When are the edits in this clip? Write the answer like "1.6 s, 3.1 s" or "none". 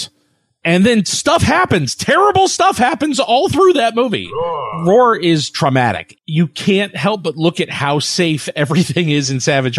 6.1 s